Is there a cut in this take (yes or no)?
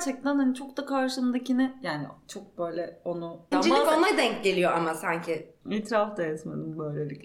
yes